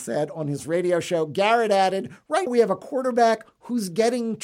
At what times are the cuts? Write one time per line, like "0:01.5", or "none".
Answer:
0:02.5

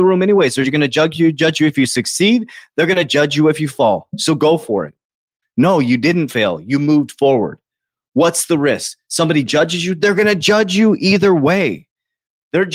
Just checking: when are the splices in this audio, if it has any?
0:05.4

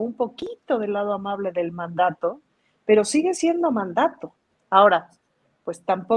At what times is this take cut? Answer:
none

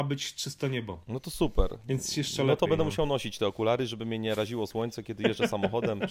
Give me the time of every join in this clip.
none

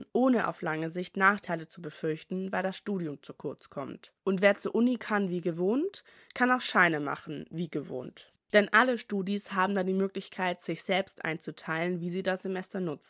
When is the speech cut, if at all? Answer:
0:08.4

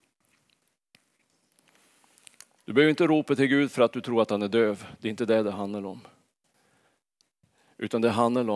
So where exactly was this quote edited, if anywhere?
none

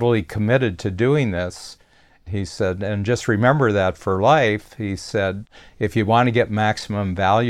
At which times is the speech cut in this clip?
none

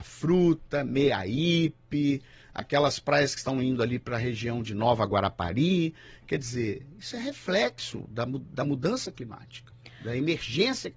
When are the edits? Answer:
none

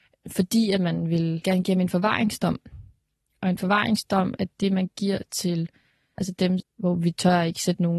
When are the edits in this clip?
0:06.6

